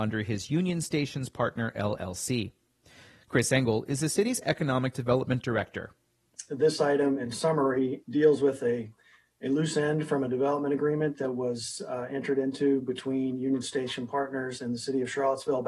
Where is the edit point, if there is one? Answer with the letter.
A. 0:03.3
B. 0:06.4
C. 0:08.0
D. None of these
C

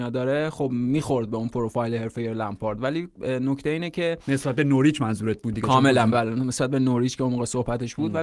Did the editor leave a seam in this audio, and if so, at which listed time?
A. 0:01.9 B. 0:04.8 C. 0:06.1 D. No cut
C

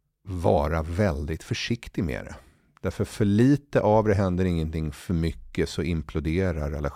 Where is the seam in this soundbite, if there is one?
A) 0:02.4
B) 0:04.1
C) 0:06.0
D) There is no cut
D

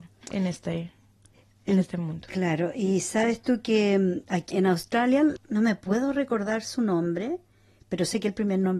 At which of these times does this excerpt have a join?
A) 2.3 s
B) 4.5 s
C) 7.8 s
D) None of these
B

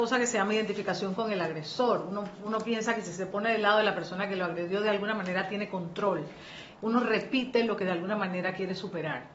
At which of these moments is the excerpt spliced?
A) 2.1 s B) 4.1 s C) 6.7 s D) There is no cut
C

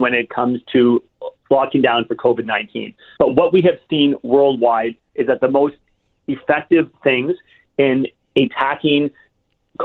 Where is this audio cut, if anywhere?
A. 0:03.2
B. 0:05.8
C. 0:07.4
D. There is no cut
A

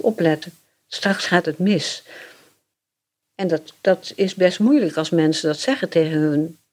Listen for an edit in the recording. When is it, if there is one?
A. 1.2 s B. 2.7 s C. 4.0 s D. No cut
D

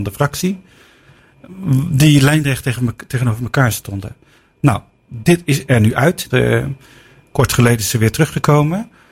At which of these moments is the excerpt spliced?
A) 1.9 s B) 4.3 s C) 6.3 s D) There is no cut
C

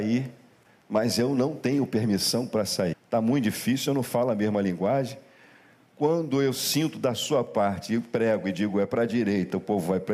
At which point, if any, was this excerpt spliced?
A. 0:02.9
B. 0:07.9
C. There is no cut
A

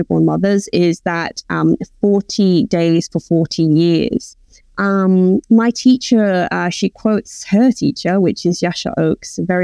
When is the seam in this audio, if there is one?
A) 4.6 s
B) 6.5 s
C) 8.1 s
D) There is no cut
A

